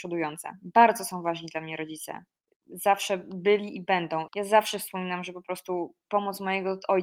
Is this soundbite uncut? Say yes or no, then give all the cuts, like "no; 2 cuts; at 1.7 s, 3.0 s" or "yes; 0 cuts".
no; 1 cut; at 4.3 s